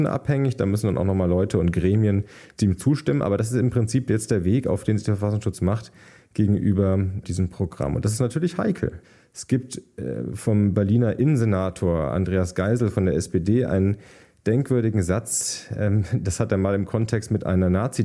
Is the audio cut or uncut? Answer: uncut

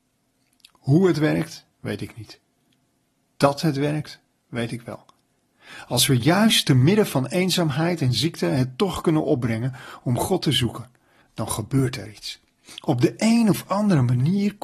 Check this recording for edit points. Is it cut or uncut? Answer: cut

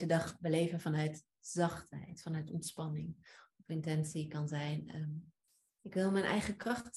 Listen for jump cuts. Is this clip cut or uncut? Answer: uncut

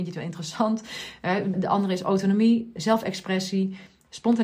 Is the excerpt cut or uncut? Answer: cut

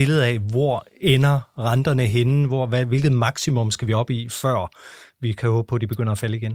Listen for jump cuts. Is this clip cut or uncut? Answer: uncut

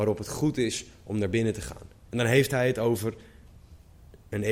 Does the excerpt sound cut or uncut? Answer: uncut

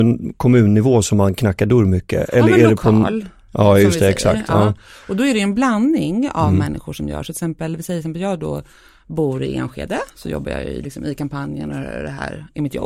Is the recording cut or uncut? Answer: uncut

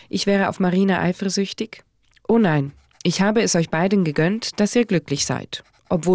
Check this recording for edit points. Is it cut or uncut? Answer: uncut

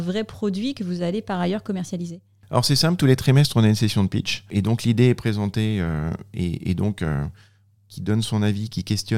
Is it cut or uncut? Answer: cut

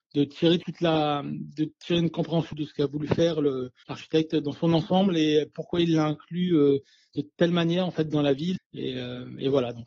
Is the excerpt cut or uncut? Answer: cut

